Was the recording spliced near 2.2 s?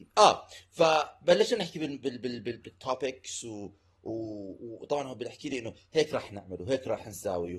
no; 0 cuts

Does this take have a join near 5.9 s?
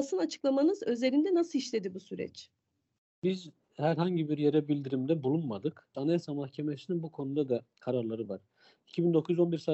yes; 1 cut; at 5.9 s

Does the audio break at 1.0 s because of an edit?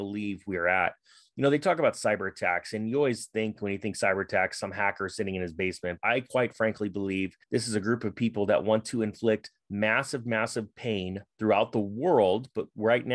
no; 2 cuts; at 6.0 s, 7.4 s

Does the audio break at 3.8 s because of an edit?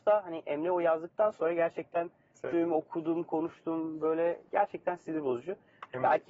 no; 1 cut; at 2.5 s

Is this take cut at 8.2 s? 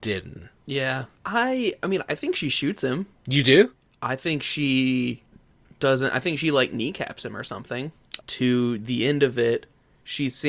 yes; 1 cut; at 8.2 s

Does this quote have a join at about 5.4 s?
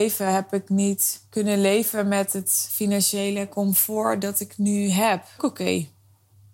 yes; 1 cut; at 5.4 s

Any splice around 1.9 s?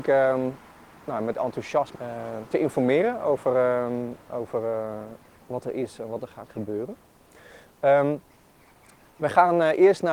yes; 1 cut; at 1.9 s

